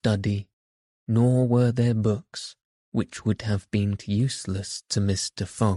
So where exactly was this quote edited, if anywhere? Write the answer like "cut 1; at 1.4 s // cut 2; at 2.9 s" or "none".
cut 1; at 4.0 s